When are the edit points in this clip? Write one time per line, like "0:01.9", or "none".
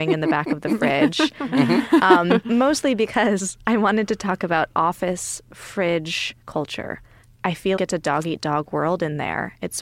0:06.4
0:07.8